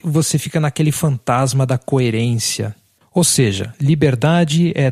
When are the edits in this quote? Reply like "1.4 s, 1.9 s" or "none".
3.0 s

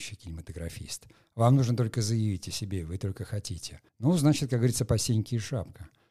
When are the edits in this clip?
3.9 s

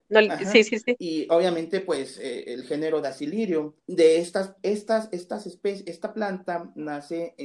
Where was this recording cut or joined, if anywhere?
3.8 s

